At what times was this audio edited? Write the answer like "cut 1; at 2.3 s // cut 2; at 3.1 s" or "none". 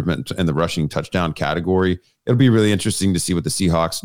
none